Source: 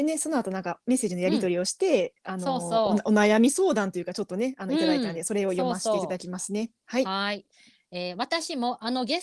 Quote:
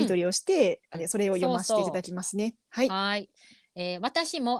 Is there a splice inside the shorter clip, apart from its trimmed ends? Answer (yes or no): yes